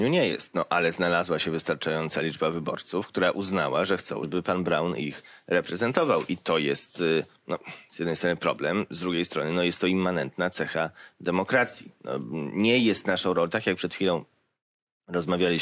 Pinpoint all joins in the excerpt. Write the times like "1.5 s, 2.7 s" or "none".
4.2 s